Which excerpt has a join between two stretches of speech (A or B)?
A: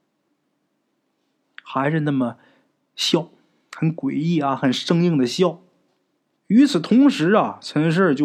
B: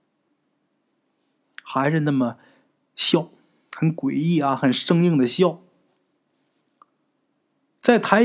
A